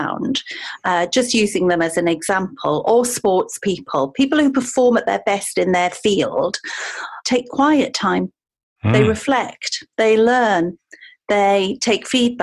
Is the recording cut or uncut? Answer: cut